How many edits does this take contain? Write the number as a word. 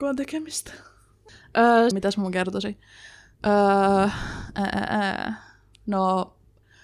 one